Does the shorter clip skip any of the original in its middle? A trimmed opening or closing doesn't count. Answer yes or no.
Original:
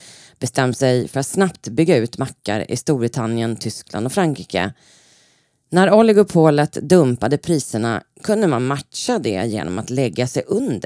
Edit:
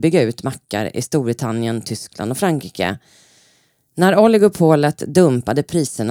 no